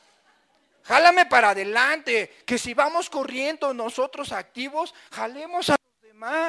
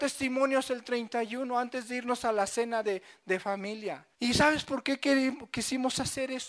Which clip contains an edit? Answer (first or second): second